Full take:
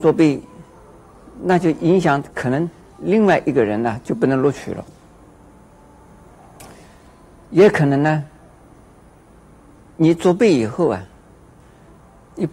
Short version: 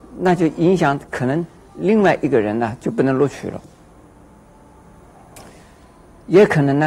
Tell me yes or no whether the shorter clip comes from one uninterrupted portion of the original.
yes